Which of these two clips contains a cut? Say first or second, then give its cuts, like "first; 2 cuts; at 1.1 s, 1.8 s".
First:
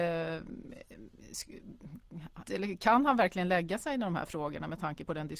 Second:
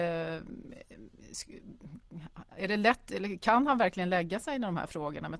first; 1 cut; at 2.4 s